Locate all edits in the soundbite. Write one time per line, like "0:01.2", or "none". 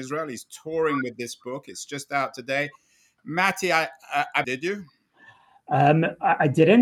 0:04.4